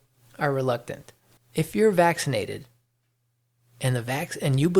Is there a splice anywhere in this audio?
yes; 1 cut; at 1.4 s

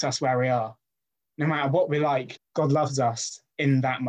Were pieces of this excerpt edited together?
yes; 1 cut; at 2.4 s

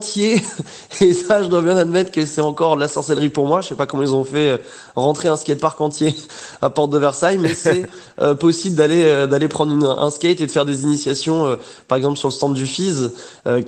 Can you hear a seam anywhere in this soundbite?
no; 0 cuts

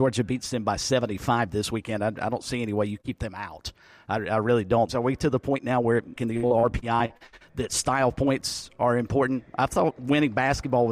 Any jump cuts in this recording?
yes; 2 cuts; at 4.9 s, 6.2 s

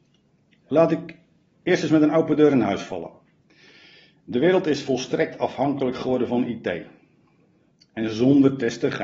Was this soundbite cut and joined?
no; 0 cuts

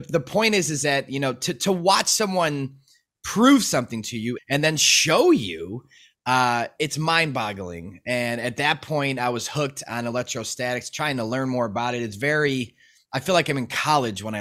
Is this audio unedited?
no; 1 cut; at 4.4 s

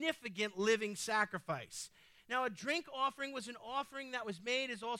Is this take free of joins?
no; 1 cut; at 2.2 s

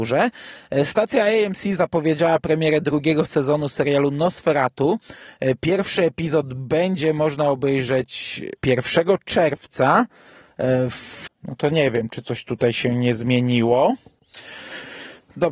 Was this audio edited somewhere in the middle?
yes; 2 cuts; at 8.6 s, 11.3 s

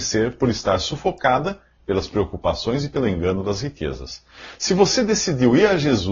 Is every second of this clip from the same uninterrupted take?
yes; 0 cuts

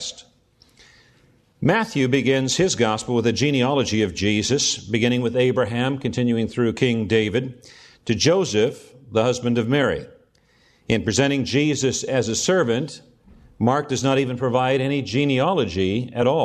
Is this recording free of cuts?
yes; 0 cuts

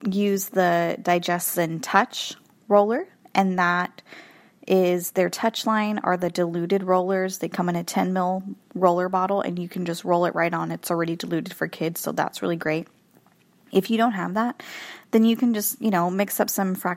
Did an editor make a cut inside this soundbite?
no; 0 cuts

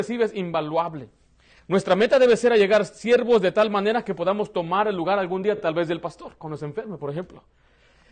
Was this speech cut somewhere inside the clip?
no; 0 cuts

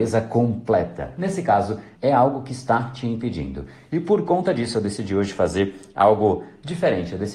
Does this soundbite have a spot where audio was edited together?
yes; 1 cut; at 2.0 s

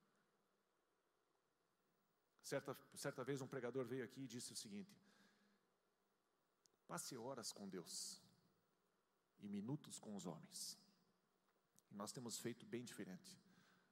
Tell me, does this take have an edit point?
no; 0 cuts

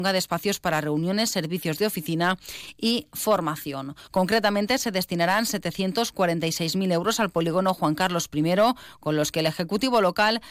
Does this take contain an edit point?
yes; 1 cut; at 4.1 s

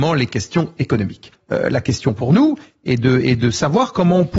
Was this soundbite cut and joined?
yes; 1 cut; at 1.3 s

